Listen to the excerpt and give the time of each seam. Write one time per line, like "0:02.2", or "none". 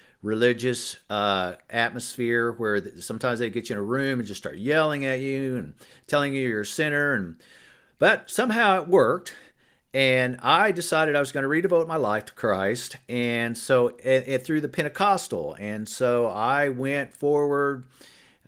none